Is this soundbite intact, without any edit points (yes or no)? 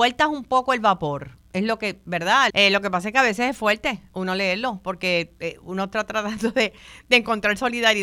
no